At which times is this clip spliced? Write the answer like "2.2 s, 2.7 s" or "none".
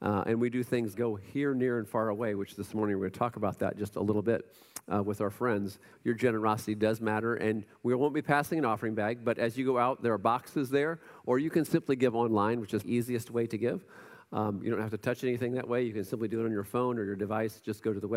0.9 s, 5.9 s, 12.8 s

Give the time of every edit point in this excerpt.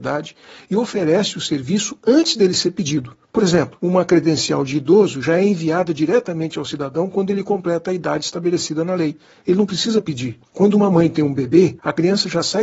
none

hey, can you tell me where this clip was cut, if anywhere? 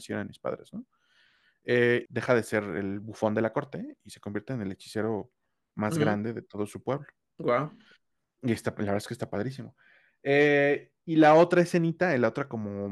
2.1 s

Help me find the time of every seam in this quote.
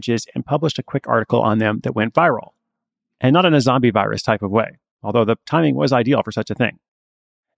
none

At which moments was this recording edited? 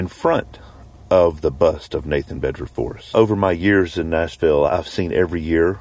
3.1 s, 4.7 s

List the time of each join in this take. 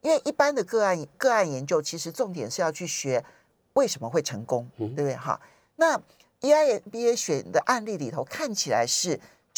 1.1 s

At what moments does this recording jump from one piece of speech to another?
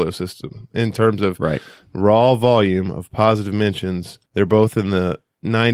4.3 s

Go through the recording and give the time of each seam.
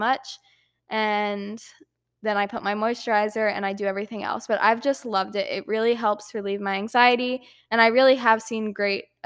none

